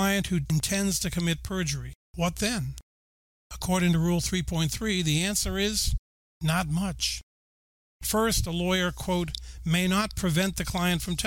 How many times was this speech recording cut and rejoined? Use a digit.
1